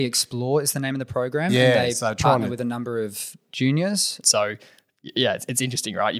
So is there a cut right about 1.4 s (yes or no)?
no